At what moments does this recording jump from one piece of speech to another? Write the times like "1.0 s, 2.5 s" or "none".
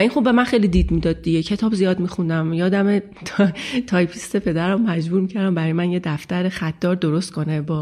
none